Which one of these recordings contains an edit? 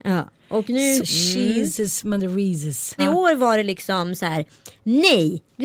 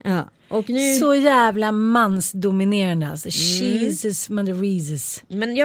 first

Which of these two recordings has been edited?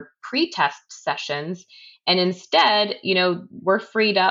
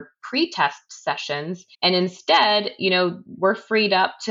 second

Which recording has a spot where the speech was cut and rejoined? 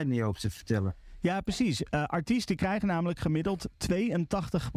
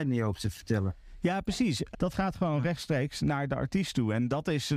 second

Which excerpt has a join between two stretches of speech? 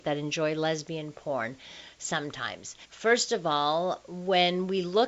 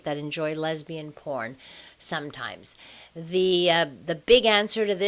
first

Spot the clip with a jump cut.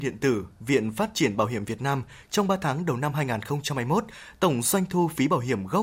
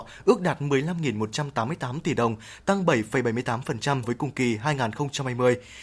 second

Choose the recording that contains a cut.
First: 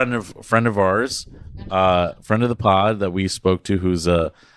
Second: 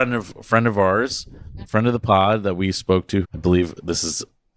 second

